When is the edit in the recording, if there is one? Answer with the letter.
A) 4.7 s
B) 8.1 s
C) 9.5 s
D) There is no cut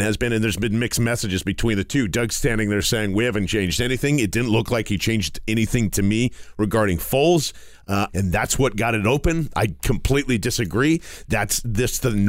B